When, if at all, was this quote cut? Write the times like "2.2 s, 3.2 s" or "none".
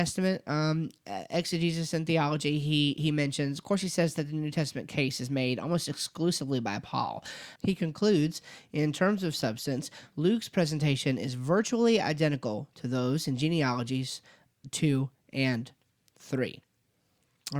7.6 s